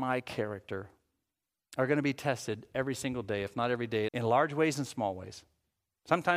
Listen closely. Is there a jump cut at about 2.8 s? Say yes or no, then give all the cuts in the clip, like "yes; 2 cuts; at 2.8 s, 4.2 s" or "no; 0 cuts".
no; 1 cut; at 4.1 s